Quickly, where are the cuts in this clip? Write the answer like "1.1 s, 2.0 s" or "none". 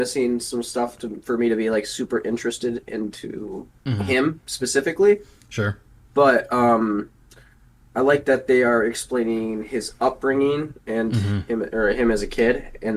none